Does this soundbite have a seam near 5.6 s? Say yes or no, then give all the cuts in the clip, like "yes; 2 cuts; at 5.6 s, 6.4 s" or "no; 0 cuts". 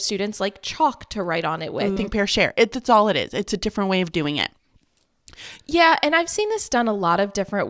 yes; 2 cuts; at 2.0 s, 5.6 s